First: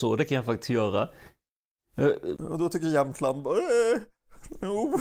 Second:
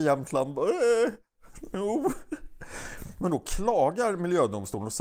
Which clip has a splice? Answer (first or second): first